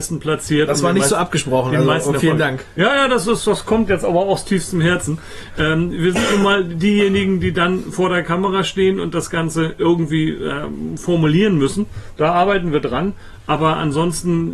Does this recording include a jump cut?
no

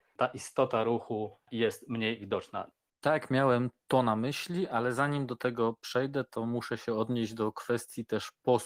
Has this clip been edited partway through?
yes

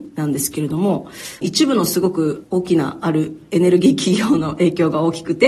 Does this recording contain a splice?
yes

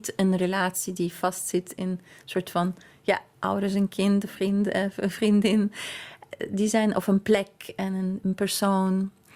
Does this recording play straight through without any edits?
yes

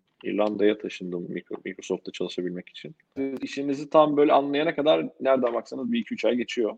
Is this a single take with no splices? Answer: no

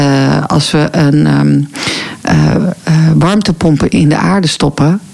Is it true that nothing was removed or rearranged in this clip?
yes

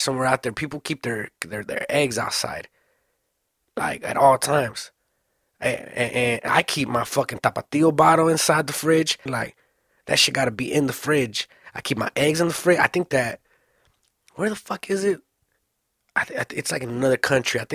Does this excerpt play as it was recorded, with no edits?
no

